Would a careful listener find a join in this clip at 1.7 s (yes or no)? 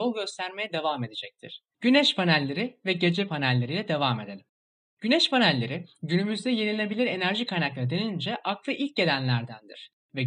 yes